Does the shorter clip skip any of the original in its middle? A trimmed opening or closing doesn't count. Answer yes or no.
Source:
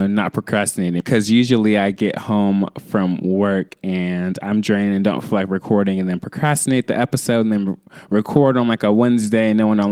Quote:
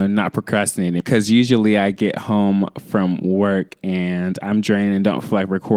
no